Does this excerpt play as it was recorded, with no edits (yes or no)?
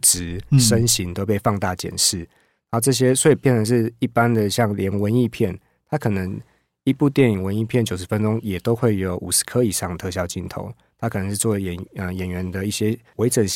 yes